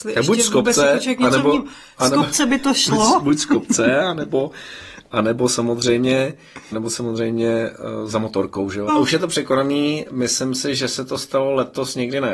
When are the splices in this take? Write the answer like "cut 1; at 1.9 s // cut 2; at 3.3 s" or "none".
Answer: cut 1; at 6.7 s // cut 2; at 8.9 s